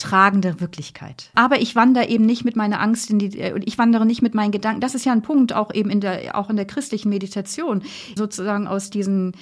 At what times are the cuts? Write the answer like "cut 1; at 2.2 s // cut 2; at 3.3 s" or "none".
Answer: cut 1; at 1.3 s // cut 2; at 8.2 s